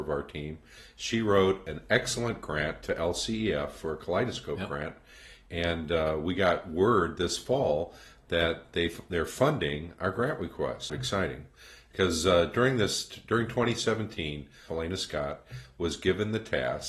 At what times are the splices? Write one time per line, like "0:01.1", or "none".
0:10.9
0:14.7